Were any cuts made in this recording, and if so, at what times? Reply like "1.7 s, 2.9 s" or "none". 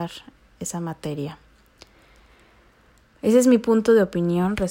none